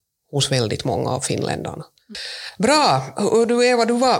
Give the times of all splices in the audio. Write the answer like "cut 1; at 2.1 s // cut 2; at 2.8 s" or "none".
none